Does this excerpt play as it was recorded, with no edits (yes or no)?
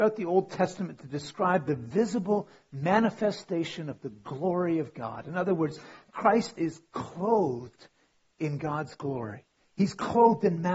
yes